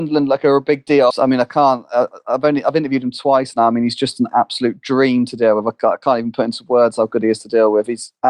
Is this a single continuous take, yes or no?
no